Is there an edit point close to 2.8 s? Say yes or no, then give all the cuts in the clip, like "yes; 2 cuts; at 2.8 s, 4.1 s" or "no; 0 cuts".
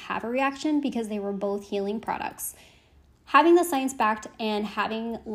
no; 0 cuts